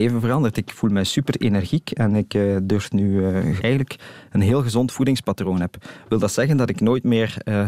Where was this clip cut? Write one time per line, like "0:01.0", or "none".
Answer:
0:03.6